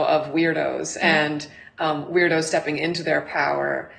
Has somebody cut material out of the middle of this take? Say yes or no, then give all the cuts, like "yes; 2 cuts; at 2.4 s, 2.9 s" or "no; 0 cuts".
no; 0 cuts